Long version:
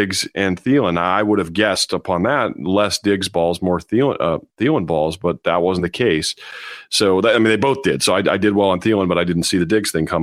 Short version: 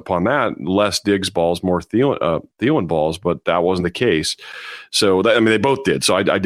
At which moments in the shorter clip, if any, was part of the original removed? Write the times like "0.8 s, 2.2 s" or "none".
none